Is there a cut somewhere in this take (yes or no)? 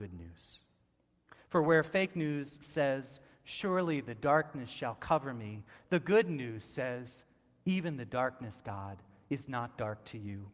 no